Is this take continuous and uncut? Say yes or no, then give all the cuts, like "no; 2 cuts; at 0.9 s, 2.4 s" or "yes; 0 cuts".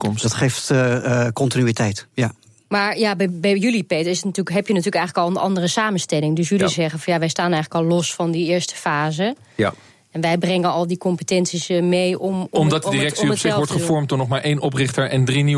yes; 0 cuts